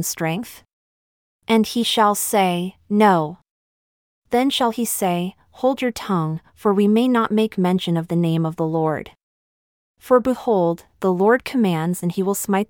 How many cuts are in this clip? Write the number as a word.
one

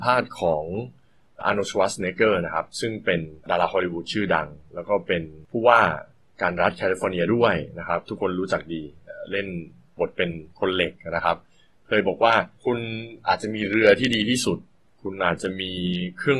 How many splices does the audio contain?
two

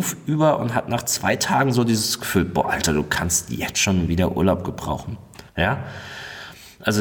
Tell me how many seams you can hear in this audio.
one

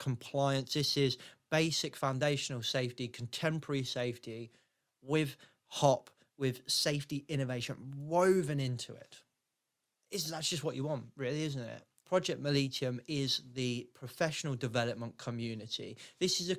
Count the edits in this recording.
one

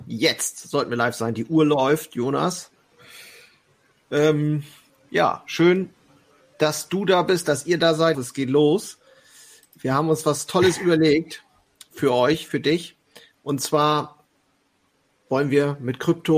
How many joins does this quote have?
one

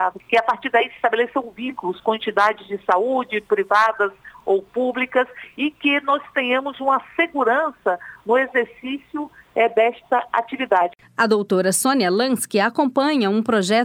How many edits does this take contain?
zero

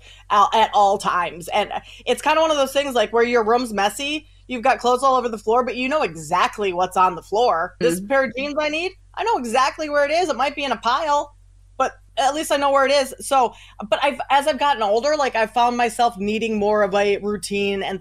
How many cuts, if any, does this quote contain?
one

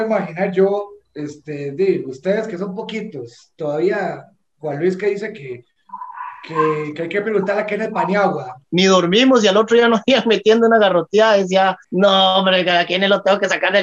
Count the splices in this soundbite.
two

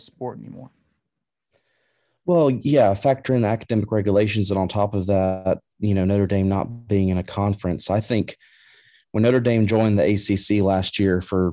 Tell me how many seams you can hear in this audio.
zero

